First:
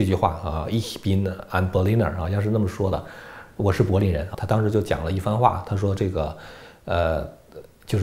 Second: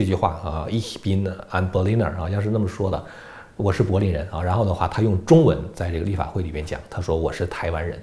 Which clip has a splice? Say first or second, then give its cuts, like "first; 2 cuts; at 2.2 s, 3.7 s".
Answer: first; 1 cut; at 4.3 s